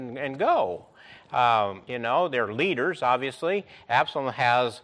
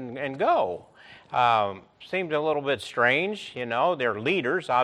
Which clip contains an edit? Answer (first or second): first